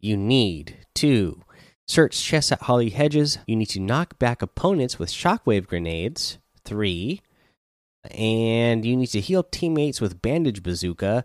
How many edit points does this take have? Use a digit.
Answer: 1